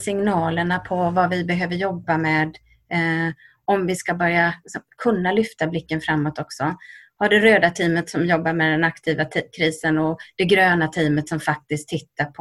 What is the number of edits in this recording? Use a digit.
0